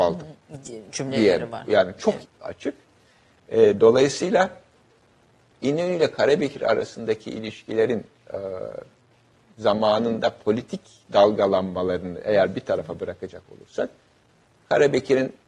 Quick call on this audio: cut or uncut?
cut